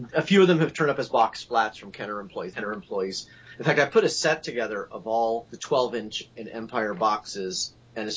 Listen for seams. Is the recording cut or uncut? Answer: cut